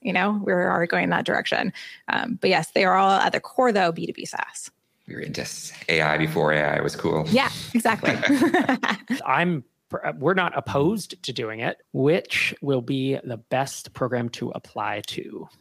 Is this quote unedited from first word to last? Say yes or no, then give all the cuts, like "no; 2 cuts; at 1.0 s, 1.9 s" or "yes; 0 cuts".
no; 2 cuts; at 9.2 s, 11.8 s